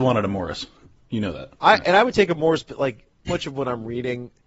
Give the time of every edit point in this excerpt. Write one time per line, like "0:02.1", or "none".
0:01.5
0:03.3